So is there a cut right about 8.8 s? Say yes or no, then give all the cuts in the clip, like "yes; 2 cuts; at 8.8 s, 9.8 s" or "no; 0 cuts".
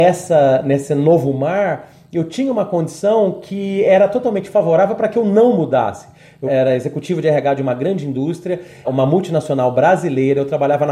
yes; 2 cuts; at 6.5 s, 8.8 s